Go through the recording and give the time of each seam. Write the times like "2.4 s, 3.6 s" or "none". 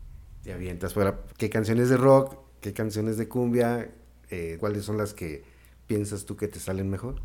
1.3 s, 4.6 s